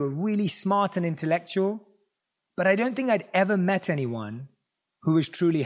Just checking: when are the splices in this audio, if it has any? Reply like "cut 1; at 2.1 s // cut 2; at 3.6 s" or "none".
none